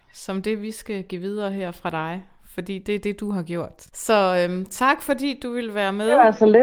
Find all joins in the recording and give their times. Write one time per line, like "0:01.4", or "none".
none